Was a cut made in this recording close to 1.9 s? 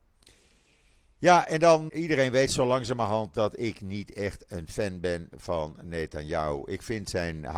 yes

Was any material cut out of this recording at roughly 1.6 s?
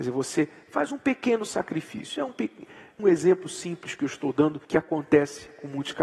no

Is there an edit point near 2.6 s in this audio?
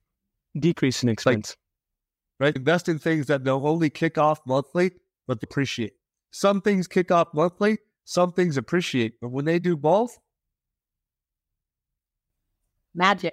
yes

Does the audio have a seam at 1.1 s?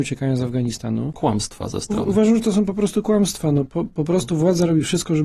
yes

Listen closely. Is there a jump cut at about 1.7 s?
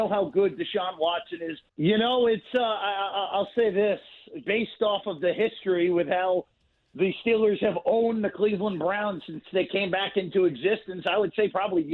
yes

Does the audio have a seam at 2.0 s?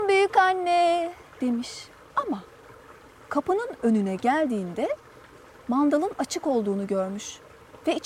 yes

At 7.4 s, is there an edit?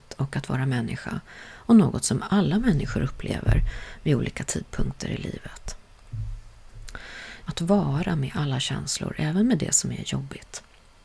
yes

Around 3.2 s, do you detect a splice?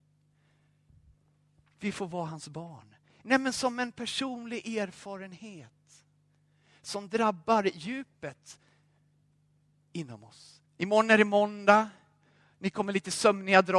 yes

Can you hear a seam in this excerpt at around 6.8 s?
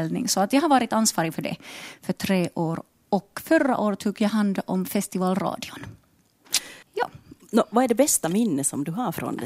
yes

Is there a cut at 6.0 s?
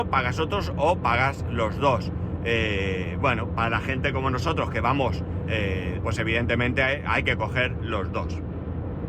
yes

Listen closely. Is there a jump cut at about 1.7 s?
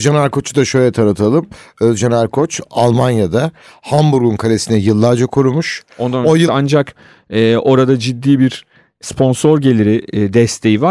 no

